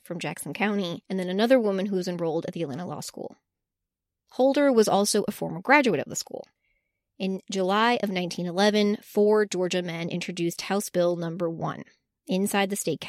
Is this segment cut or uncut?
uncut